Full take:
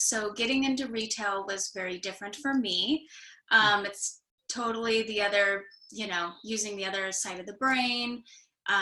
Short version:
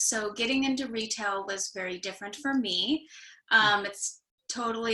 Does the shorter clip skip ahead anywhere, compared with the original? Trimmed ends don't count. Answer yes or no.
no